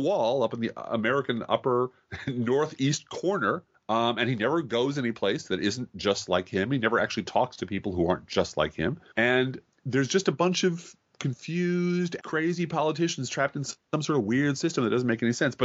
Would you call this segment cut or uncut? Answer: cut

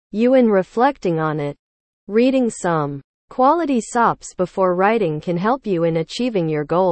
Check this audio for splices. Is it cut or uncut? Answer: cut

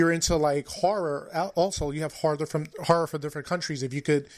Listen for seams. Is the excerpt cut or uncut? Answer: uncut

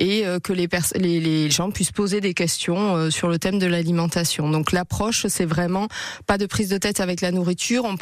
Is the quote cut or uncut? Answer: cut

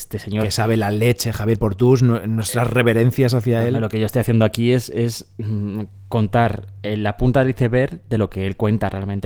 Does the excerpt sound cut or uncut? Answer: uncut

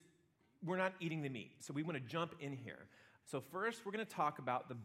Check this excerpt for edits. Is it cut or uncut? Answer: cut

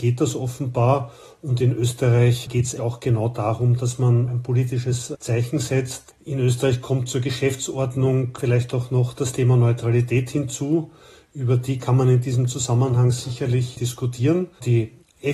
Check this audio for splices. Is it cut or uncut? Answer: cut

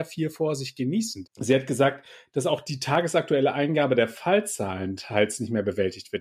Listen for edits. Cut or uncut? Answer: cut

